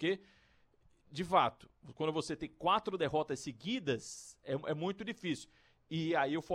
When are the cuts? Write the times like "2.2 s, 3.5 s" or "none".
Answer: none